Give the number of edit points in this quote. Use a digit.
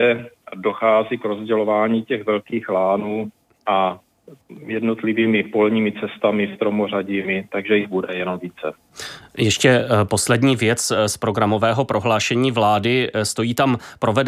1